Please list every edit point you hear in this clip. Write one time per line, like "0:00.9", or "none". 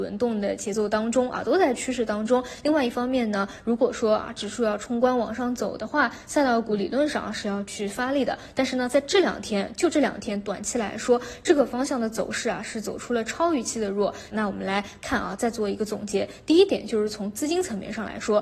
0:14.3